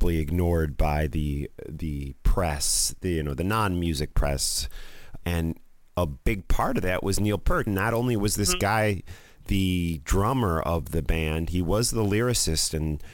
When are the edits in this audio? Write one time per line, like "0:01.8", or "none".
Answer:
0:05.2
0:07.7